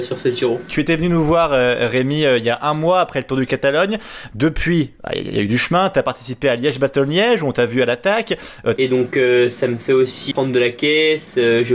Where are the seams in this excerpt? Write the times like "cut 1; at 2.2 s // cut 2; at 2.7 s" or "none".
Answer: cut 1; at 8.8 s // cut 2; at 10.3 s